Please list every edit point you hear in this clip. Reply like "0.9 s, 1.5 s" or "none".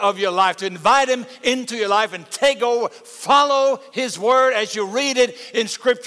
none